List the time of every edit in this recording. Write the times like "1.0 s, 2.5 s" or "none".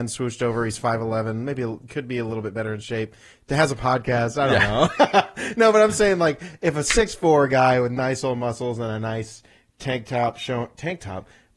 1.9 s